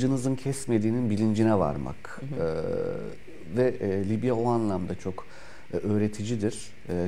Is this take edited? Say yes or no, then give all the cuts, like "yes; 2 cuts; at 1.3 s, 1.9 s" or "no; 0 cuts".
no; 0 cuts